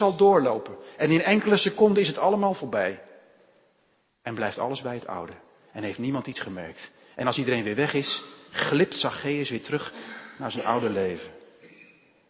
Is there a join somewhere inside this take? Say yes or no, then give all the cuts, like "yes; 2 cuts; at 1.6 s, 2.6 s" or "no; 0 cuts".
no; 0 cuts